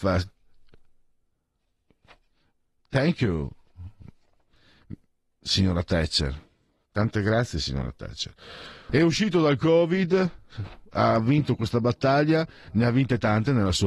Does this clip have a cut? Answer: yes; 1 cut; at 8.9 s

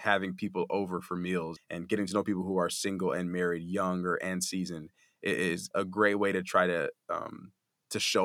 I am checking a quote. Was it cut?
yes; 2 cuts; at 1.6 s, 5.7 s

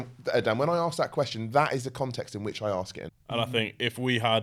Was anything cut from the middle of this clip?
yes; 1 cut; at 3.1 s

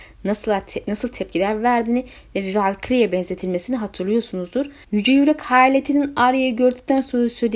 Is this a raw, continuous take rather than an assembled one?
no; 1 cut; at 4.8 s

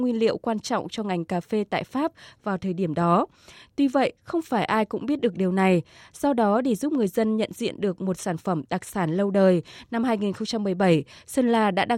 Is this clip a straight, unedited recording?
yes; 0 cuts

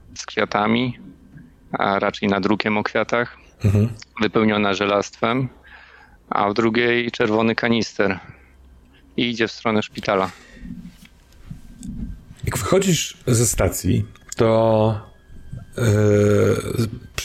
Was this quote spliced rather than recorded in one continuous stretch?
no; 0 cuts

